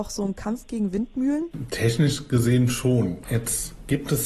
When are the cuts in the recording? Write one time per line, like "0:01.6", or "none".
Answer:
none